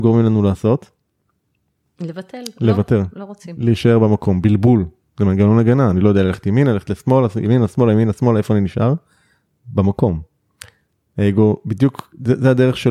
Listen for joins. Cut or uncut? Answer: uncut